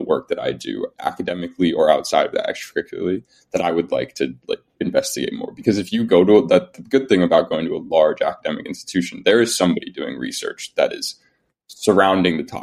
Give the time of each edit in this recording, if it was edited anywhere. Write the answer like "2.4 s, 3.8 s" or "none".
0.9 s